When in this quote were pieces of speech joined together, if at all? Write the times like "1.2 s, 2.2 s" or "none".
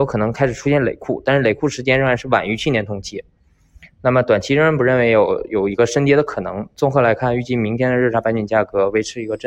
none